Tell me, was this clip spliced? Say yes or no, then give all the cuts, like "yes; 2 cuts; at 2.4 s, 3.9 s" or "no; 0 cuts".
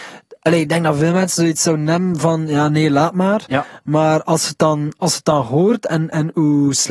no; 0 cuts